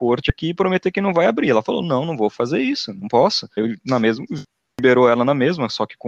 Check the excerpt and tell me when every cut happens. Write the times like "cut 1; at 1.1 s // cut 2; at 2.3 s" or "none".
cut 1; at 3.6 s

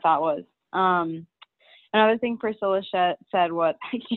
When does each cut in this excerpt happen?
none

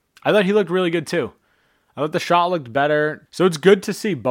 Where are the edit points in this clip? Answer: cut 1; at 3.3 s

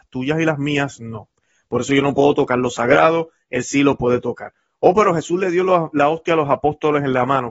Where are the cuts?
none

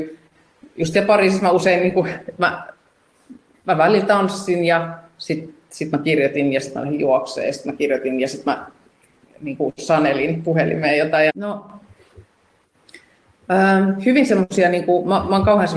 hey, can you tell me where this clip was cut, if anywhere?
cut 1; at 11.3 s

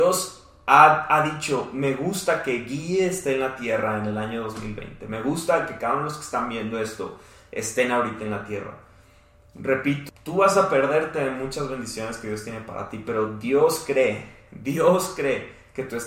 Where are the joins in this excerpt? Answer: cut 1; at 10.1 s

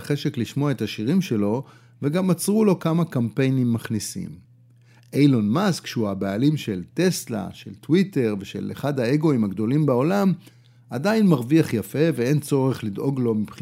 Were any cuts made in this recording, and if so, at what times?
none

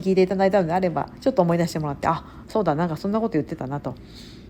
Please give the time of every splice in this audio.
none

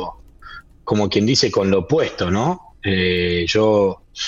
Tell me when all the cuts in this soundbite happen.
none

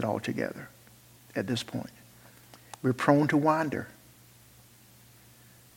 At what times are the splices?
cut 1; at 2.7 s

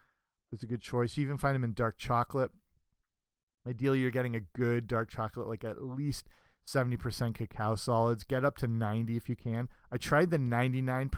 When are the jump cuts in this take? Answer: none

